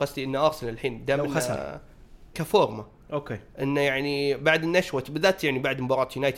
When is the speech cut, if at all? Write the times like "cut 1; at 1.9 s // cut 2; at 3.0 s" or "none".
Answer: cut 1; at 2.3 s